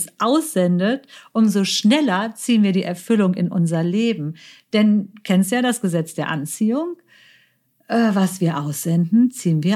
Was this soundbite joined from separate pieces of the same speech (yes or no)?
no